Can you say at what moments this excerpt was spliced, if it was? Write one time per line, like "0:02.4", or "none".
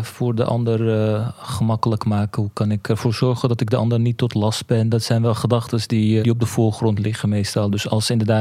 0:06.2